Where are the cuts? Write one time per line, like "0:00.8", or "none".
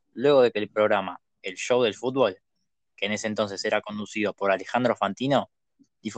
none